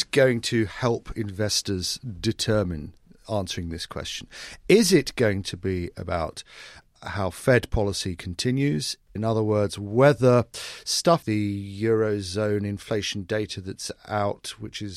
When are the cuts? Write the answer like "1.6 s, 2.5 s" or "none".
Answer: 9.2 s, 11.2 s